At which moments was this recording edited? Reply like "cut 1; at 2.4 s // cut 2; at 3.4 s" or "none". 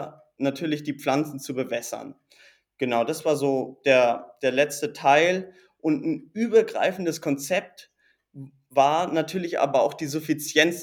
none